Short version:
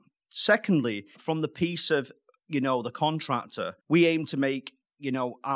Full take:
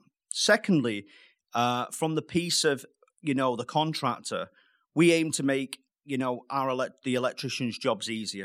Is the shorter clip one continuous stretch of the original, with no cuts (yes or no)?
no